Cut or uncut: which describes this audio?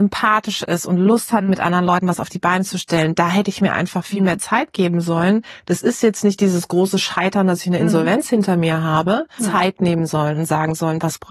cut